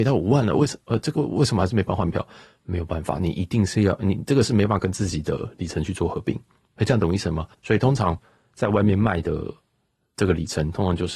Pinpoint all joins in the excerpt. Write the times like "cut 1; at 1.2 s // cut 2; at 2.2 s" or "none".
cut 1; at 1.2 s // cut 2; at 7.5 s